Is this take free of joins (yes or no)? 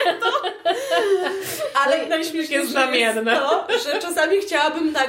yes